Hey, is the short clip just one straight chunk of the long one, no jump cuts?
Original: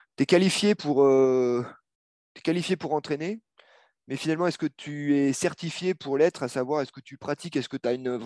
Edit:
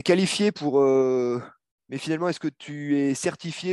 no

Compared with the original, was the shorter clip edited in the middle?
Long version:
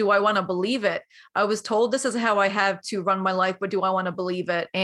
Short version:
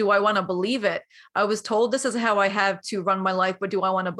no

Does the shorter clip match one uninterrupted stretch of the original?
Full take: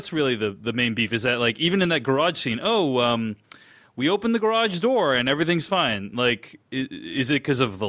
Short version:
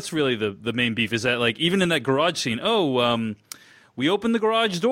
yes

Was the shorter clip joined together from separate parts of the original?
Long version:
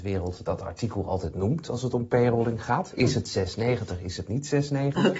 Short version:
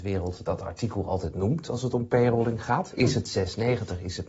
no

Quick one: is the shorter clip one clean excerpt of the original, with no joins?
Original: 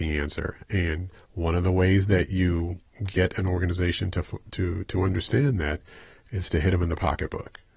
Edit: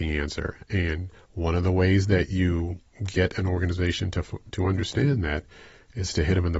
no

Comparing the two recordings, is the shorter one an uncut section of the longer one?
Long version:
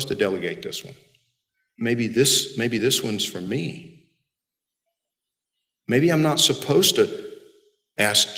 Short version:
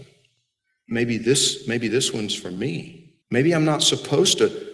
no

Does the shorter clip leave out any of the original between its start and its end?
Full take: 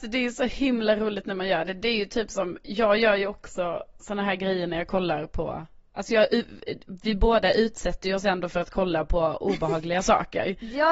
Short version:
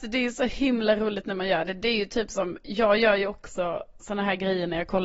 no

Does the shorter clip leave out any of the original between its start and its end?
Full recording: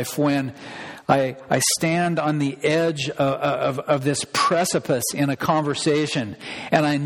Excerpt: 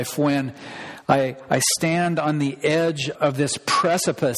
yes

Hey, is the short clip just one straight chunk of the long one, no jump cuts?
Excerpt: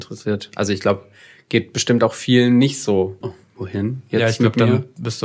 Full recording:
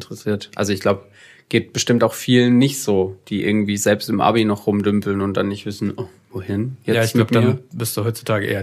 no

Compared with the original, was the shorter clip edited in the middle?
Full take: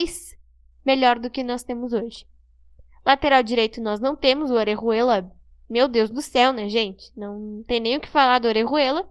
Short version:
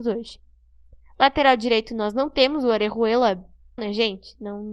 yes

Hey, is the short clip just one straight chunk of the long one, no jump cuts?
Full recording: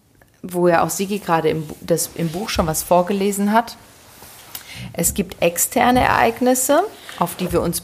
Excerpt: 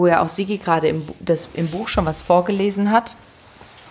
yes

